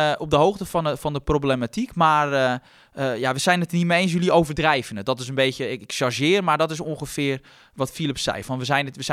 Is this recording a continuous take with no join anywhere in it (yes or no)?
yes